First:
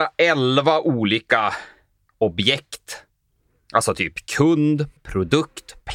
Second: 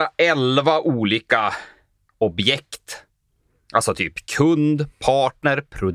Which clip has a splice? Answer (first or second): first